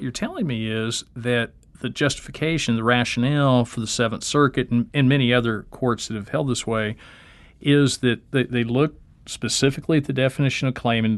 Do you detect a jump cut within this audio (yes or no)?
no